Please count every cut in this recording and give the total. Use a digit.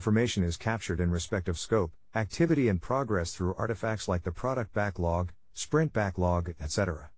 0